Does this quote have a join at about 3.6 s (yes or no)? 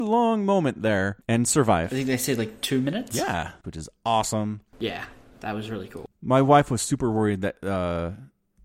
yes